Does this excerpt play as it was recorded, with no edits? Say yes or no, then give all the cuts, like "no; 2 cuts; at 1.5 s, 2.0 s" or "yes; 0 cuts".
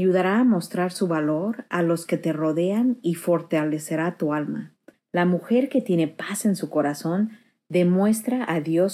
no; 1 cut; at 4.9 s